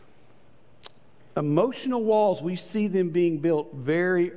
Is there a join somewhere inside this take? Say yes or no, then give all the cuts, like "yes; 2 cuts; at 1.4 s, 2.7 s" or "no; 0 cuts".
no; 0 cuts